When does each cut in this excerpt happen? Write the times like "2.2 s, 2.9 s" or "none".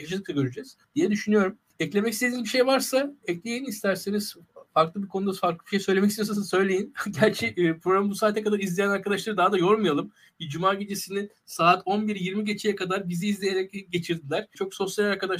none